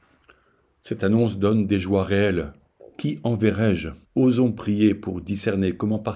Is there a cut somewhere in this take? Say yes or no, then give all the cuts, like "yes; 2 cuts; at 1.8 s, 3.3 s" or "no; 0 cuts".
yes; 2 cuts; at 2.8 s, 4.0 s